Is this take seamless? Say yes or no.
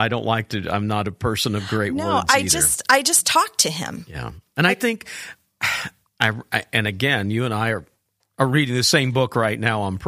yes